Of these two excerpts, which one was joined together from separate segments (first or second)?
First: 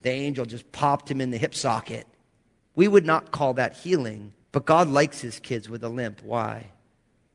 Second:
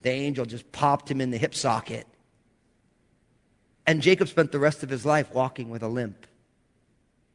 first